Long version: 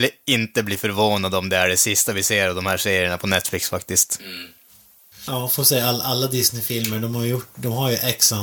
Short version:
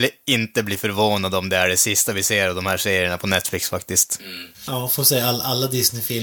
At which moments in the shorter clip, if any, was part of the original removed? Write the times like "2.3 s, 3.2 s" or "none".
4.5 s